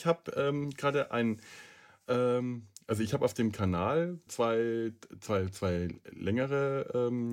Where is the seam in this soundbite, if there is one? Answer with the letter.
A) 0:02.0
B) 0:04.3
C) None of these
B